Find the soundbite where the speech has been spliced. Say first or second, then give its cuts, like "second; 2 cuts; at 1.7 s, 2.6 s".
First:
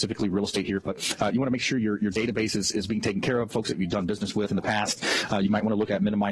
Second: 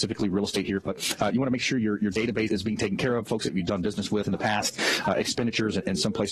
second; 2 cuts; at 2.5 s, 5.0 s